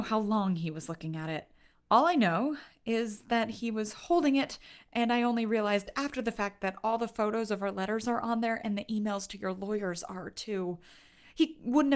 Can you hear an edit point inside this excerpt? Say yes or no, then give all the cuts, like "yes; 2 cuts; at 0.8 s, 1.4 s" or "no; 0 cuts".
no; 0 cuts